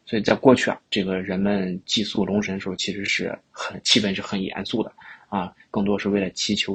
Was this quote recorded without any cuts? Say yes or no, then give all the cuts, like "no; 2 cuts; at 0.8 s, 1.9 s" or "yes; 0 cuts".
yes; 0 cuts